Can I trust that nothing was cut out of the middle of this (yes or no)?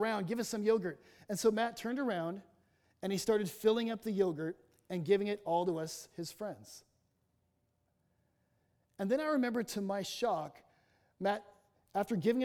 yes